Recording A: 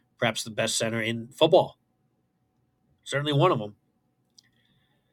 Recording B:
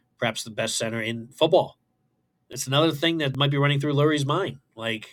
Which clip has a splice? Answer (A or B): B